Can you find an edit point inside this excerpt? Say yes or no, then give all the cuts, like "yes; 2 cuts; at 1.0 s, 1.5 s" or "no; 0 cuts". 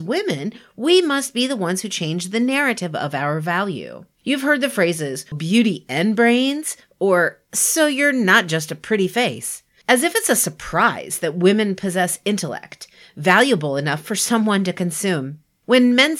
yes; 1 cut; at 5.3 s